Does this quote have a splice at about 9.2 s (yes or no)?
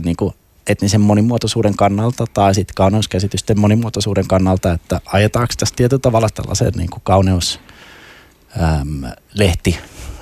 no